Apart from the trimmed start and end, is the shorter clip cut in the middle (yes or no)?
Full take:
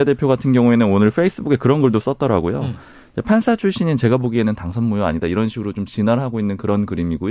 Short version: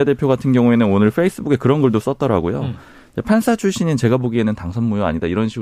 no